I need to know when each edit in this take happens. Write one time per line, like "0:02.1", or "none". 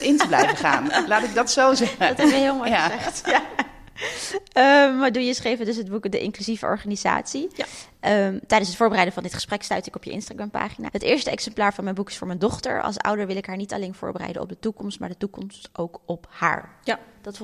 0:10.9